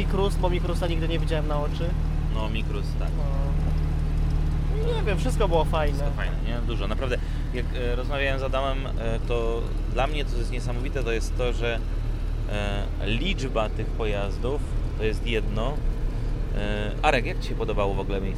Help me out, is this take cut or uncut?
cut